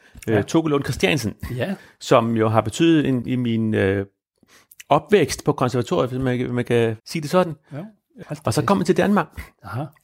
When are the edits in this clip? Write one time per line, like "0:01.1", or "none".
0:03.2
0:07.0
0:08.2